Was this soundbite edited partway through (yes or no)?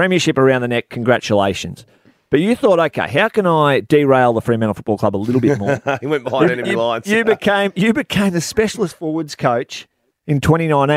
no